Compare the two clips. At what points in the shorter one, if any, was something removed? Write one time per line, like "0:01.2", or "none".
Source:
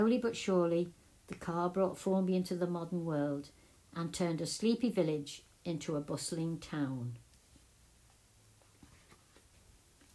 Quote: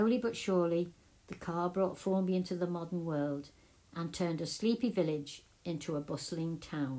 none